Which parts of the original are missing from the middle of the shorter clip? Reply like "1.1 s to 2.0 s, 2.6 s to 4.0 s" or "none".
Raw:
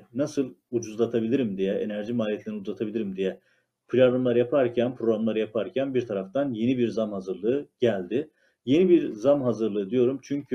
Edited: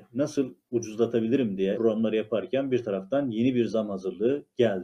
1.7 s to 5.0 s